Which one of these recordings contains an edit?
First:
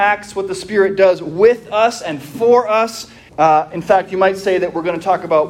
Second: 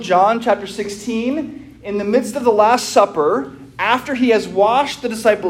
first; 1 cut; at 3.3 s

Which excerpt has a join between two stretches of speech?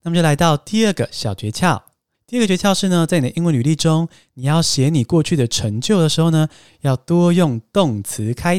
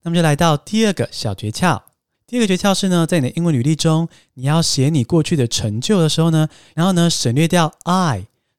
second; 1 cut; at 6.7 s

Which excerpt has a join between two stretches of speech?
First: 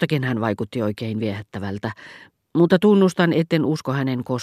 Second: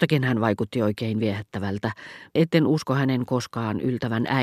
second; 1 cut; at 2.4 s

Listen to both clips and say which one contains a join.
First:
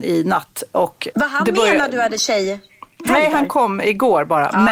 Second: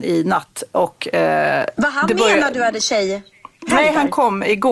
first; 1 cut; at 1.1 s

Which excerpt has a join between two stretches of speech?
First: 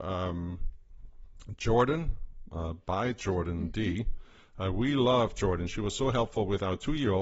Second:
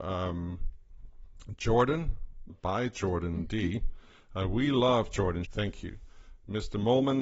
second; 2 cuts; at 2.5 s, 5.4 s

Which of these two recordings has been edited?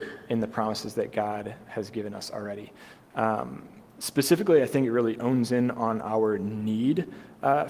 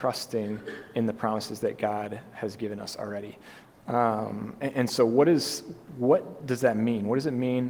second; 1 cut; at 3.7 s

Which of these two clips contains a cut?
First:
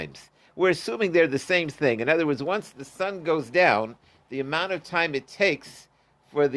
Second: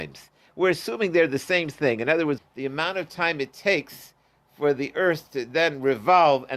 second; 1 cut; at 2.4 s

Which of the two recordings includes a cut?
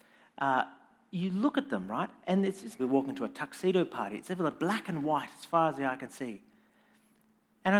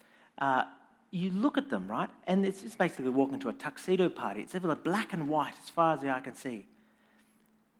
first; 1 cut; at 2.8 s

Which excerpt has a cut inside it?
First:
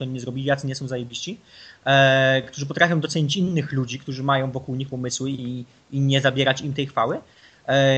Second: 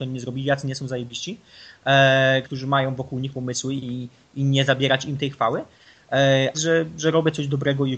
second; 2 cuts; at 2.4 s, 6.5 s

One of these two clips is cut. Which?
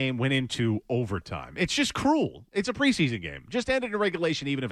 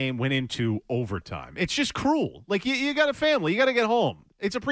first; 1 cut; at 2.5 s

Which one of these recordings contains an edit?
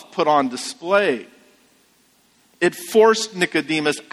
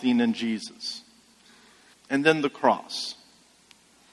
second; 1 cut; at 1.9 s

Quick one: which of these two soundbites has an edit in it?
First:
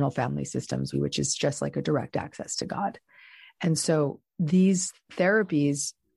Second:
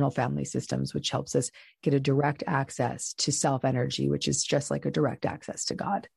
first; 1 cut; at 0.9 s

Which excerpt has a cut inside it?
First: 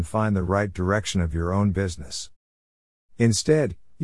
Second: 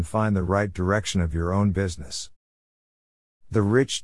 first; 1 cut; at 3.0 s

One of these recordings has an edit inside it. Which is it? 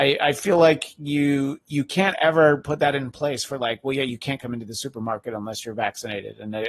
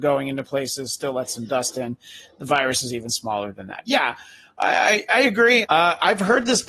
second; 1 cut; at 5.6 s

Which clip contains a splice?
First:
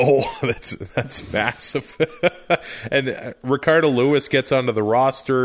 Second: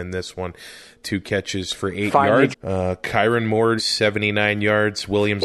second; 2 cuts; at 2.5 s, 3.8 s

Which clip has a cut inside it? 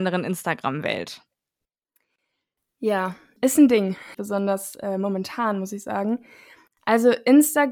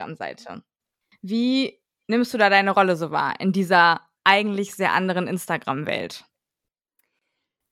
first; 1 cut; at 4.1 s

